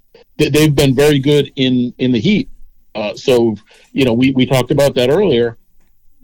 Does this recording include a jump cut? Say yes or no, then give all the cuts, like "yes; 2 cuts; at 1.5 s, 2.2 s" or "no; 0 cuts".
no; 0 cuts